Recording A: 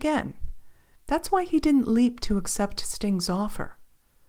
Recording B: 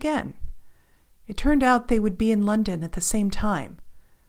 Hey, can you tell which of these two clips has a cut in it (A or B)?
A